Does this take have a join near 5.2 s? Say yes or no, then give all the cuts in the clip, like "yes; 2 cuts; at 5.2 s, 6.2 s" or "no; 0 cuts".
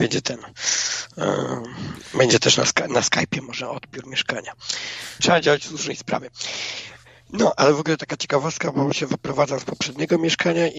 yes; 1 cut; at 5.2 s